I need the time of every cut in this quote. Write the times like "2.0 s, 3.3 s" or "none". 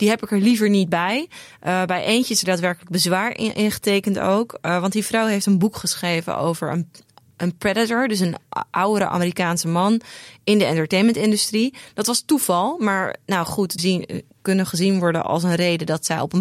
13.8 s